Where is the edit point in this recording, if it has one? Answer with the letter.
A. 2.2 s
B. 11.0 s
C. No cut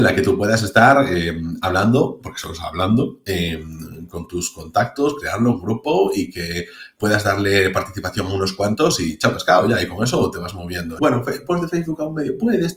B